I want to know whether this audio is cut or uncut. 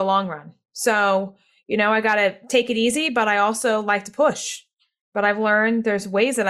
uncut